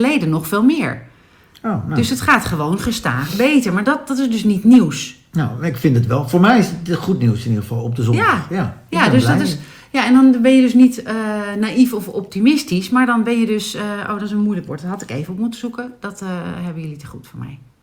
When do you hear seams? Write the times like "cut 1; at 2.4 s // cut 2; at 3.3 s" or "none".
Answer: none